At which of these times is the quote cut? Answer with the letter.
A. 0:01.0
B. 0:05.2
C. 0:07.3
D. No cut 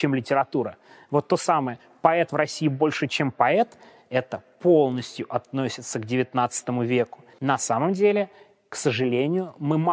C